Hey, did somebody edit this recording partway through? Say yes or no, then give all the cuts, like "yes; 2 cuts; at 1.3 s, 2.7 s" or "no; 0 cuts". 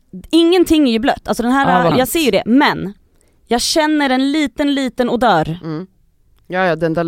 yes; 1 cut; at 1.9 s